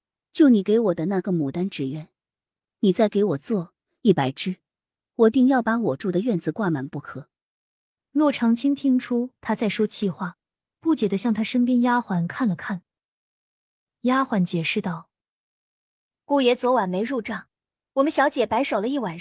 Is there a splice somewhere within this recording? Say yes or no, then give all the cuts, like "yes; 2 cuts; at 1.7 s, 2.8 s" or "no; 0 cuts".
no; 0 cuts